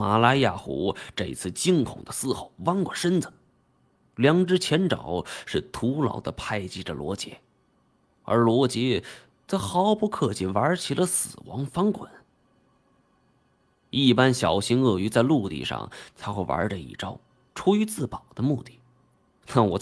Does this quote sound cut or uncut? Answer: uncut